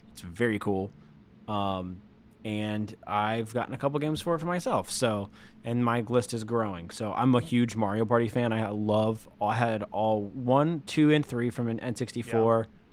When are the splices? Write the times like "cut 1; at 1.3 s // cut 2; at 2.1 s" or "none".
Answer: none